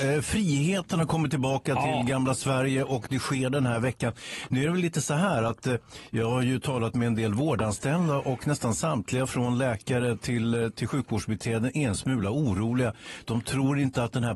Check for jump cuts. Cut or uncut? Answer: uncut